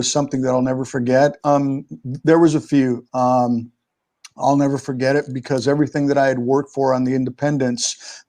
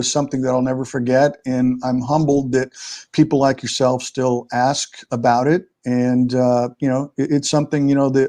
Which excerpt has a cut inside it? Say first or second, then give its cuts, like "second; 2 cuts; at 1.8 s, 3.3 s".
first; 2 cuts; at 1.4 s, 3.1 s